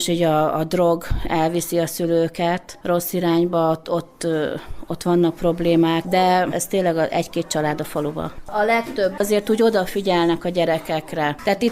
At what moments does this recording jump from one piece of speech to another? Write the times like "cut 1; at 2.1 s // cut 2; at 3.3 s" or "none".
cut 1; at 6.0 s